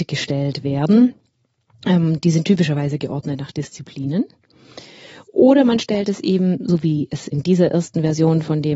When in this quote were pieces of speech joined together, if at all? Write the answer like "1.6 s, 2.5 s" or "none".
none